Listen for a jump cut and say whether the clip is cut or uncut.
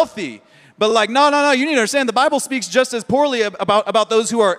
uncut